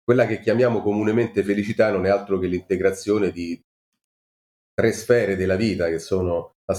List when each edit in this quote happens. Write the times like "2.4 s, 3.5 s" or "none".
none